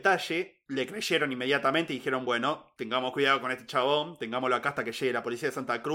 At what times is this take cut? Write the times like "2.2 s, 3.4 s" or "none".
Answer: none

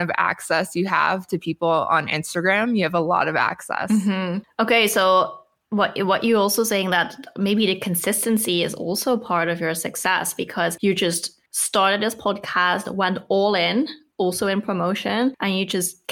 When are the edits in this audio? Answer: 11.5 s

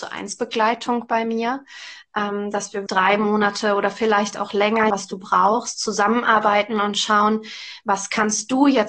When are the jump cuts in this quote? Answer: 2.9 s, 4.9 s

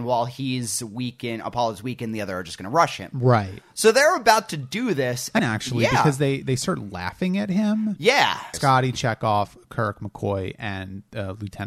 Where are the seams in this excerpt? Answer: 5.4 s, 6.4 s, 8.5 s

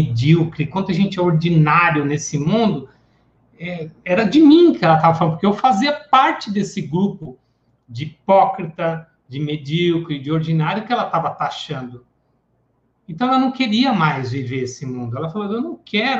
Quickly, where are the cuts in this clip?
9.3 s

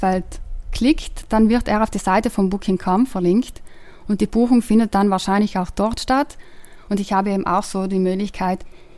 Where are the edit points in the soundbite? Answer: 6.9 s

